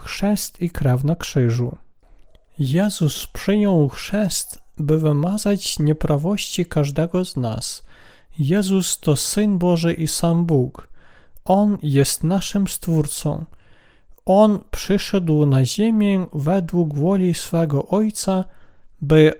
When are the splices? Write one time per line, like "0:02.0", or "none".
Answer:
none